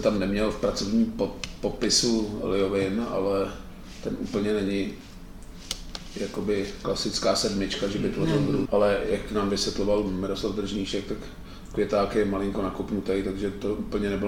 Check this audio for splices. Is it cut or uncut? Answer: cut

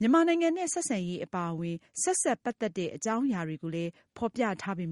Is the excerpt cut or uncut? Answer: uncut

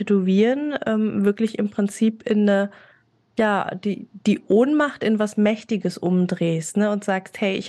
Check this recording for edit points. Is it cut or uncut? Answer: uncut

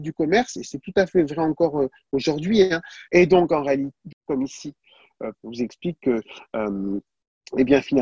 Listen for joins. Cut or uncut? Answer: cut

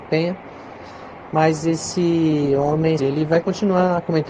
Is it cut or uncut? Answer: cut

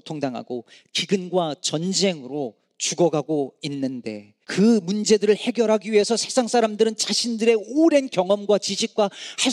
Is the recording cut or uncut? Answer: cut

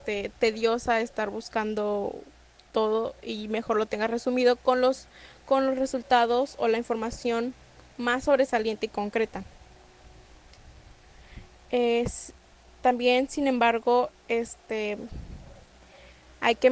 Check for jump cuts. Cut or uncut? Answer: uncut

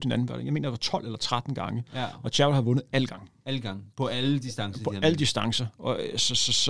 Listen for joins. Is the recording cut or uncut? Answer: uncut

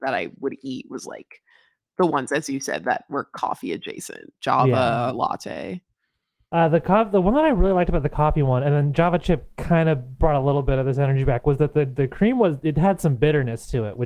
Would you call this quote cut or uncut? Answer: uncut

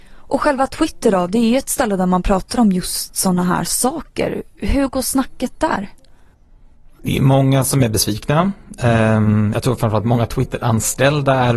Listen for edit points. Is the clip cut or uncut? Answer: uncut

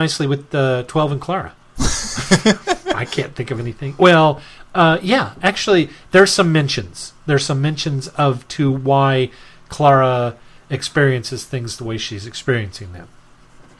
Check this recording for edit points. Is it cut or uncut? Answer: uncut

